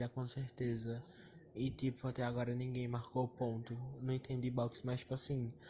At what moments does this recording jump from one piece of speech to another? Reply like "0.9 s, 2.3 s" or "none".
none